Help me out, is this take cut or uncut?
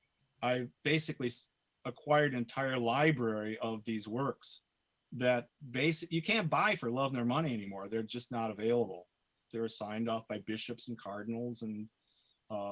cut